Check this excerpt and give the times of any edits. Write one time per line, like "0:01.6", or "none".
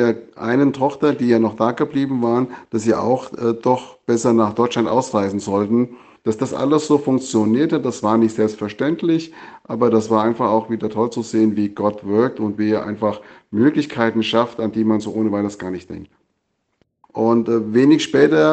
0:06.2
0:17.0